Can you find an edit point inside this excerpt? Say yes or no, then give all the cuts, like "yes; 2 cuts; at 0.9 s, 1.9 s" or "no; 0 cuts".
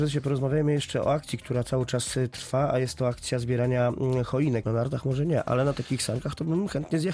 yes; 1 cut; at 4.6 s